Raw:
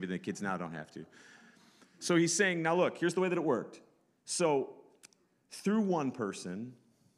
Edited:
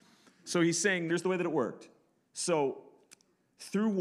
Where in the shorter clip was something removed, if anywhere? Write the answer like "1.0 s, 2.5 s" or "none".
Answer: 1.1 s